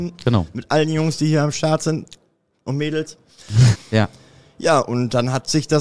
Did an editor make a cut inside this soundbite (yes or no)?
yes